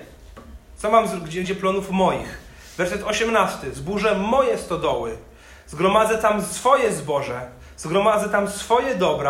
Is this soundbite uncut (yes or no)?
no